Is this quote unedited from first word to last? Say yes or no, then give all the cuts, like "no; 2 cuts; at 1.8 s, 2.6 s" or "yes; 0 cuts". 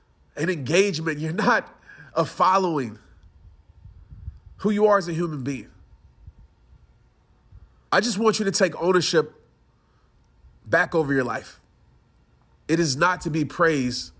no; 2 cuts; at 7.9 s, 12.7 s